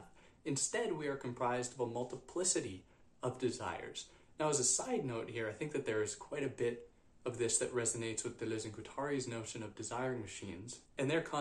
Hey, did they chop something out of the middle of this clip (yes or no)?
no